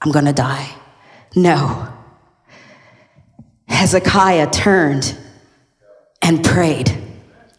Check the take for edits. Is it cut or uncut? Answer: uncut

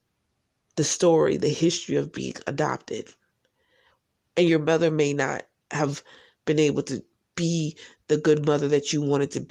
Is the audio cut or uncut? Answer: uncut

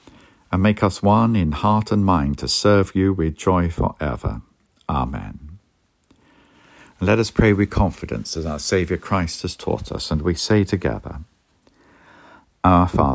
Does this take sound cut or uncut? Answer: uncut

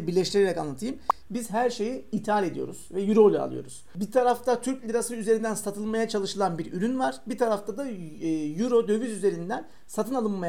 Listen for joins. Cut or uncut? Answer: cut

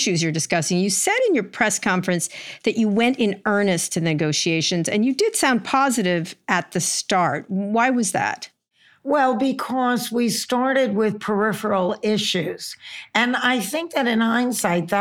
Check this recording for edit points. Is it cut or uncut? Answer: uncut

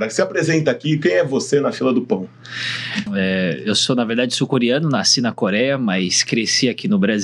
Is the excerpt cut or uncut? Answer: cut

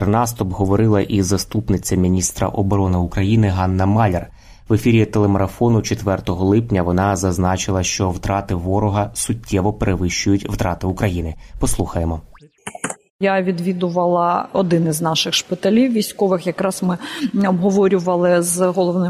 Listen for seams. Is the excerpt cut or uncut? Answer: cut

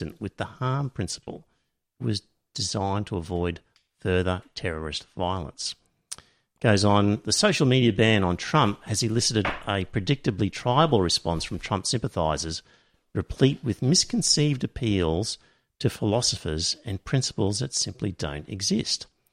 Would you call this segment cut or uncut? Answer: uncut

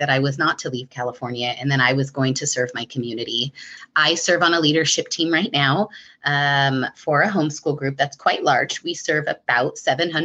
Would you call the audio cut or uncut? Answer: uncut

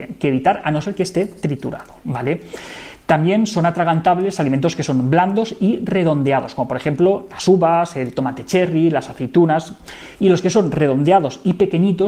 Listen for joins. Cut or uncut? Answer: cut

